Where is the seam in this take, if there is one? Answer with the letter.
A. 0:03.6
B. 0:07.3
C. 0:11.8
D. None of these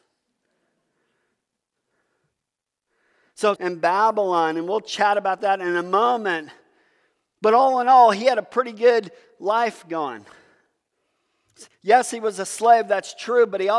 A